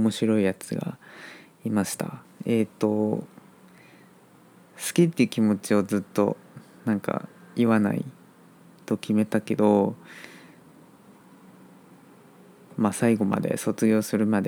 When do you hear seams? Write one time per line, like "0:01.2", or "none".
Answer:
none